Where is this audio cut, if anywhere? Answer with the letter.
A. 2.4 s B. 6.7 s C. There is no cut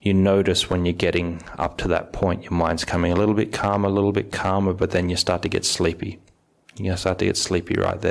C